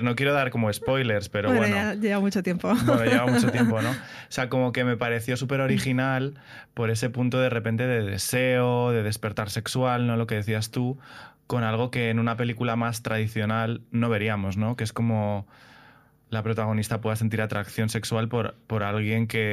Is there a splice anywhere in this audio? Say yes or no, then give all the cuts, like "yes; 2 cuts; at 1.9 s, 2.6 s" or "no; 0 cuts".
no; 0 cuts